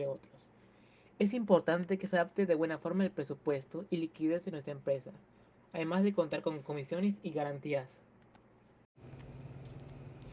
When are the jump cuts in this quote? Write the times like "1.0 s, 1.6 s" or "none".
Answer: 5.6 s